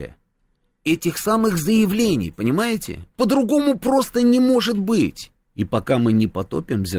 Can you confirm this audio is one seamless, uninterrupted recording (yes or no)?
no